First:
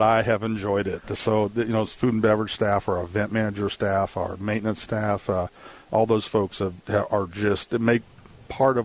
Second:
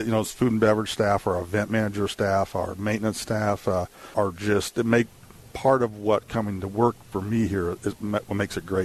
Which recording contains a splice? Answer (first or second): second